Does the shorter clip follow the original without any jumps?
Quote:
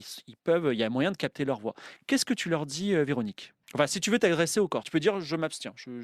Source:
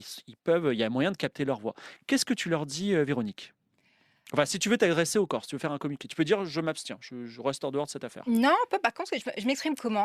no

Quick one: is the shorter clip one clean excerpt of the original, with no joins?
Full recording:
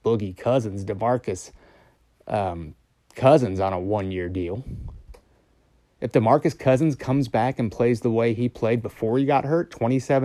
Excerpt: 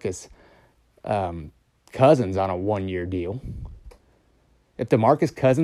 yes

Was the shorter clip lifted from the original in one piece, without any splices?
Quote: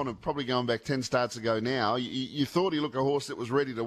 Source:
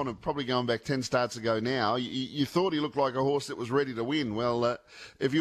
no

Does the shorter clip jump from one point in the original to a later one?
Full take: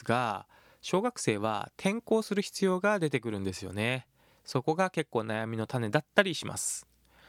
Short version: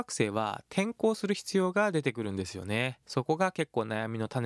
yes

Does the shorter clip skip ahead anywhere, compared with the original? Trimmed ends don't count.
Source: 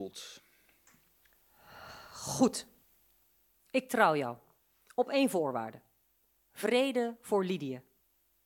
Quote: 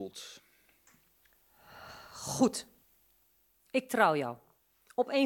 no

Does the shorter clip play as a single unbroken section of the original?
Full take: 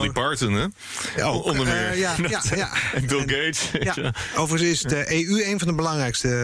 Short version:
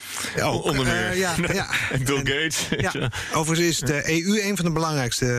no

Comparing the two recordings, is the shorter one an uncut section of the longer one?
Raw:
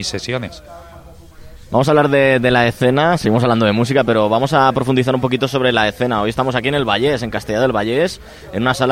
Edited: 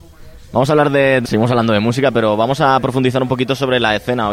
no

